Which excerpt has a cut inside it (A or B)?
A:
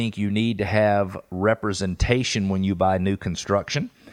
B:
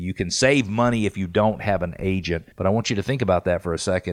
B